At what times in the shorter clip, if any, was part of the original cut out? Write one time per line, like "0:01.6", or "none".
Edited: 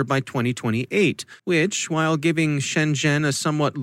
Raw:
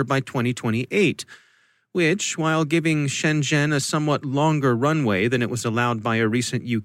0:01.4